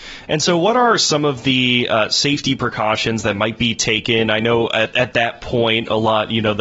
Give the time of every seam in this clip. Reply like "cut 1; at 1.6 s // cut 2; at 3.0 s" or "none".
none